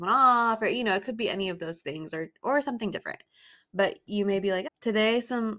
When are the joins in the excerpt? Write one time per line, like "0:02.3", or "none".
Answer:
0:04.7